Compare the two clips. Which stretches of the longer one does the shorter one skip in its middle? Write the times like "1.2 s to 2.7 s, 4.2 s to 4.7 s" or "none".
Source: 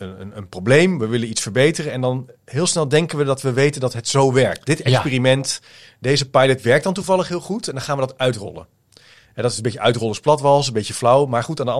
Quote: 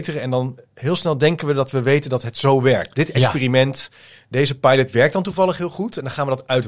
none